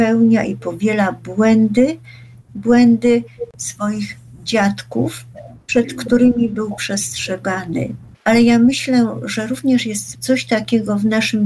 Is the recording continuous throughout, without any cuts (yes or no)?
yes